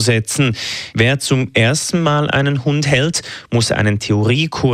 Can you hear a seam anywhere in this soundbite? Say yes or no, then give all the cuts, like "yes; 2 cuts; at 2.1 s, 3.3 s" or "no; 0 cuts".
yes; 1 cut; at 0.9 s